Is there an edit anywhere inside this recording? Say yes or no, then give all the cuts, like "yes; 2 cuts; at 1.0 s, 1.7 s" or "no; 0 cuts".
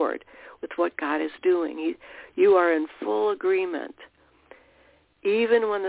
no; 0 cuts